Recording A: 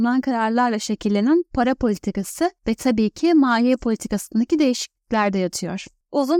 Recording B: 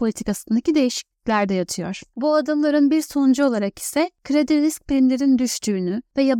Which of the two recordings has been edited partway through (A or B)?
B